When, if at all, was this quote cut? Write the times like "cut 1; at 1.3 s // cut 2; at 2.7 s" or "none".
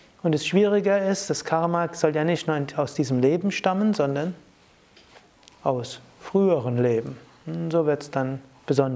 none